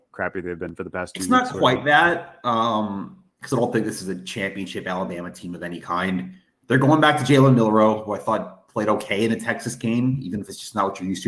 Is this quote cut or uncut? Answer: cut